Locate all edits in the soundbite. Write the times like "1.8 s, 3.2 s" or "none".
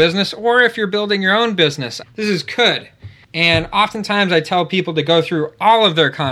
2.0 s